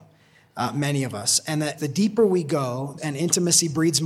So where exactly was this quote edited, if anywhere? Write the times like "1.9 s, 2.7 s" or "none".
1.8 s, 3.0 s